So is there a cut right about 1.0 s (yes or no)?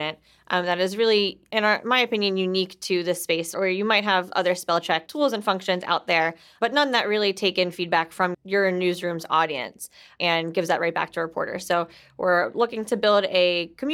no